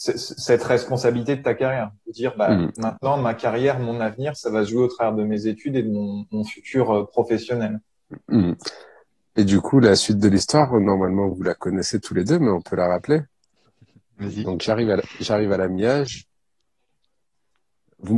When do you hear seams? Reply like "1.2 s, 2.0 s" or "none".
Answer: none